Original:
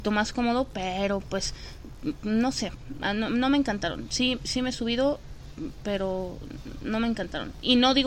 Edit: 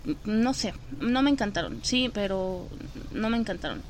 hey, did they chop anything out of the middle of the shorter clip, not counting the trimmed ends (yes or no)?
yes